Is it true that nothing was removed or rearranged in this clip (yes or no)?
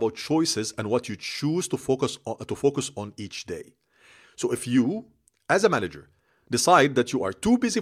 yes